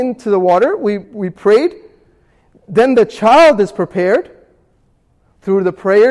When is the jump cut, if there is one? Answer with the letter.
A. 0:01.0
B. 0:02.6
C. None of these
A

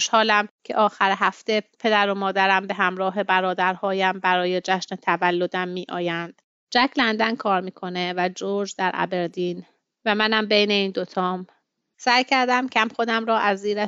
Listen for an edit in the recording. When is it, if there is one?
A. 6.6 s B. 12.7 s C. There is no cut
B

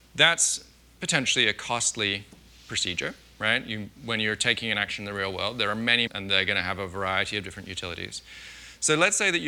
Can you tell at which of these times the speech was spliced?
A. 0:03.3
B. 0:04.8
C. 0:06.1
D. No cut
C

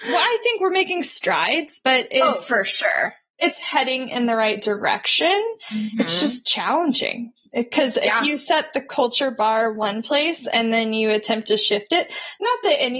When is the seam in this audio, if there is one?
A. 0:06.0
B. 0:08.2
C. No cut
C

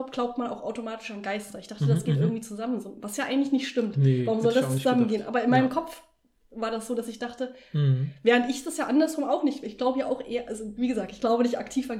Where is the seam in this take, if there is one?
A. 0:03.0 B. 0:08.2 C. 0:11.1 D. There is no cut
D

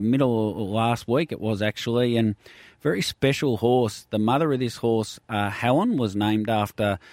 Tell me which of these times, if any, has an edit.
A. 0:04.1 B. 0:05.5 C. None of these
C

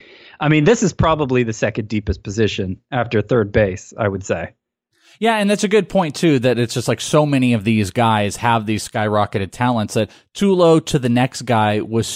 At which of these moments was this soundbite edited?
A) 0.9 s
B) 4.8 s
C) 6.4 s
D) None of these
D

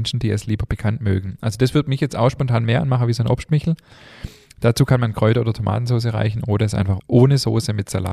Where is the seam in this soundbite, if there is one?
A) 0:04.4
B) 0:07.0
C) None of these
B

